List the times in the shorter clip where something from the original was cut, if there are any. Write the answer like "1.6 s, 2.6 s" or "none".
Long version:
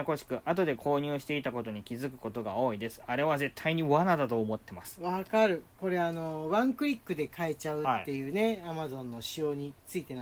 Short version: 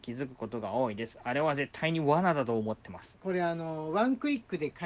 3.1 s